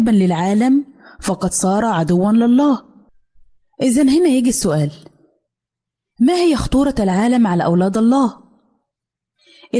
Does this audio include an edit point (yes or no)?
no